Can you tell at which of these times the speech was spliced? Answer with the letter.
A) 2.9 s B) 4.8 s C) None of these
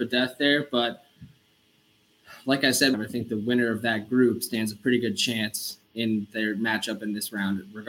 A